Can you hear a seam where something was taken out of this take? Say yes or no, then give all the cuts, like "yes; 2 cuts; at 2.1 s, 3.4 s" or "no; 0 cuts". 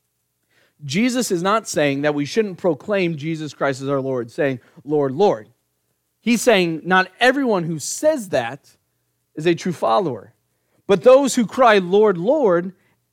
no; 0 cuts